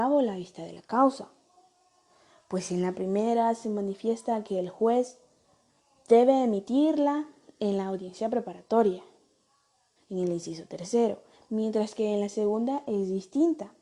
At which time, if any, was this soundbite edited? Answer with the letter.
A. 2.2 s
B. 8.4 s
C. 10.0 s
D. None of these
C